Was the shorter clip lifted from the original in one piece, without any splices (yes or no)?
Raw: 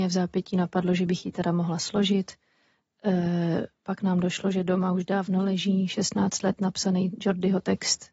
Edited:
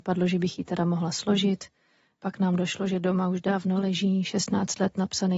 no